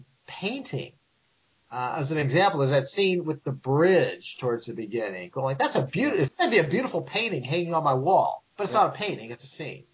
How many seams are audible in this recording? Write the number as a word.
two